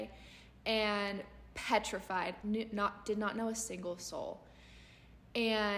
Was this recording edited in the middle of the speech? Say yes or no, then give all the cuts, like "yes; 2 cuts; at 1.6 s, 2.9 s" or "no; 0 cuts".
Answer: yes; 1 cut; at 2.4 s